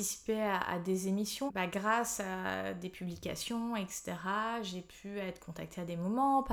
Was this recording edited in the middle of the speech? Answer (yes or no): yes